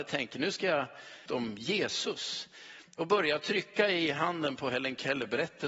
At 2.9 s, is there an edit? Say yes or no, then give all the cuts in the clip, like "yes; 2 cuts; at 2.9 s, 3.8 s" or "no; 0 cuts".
no; 1 cut; at 1.3 s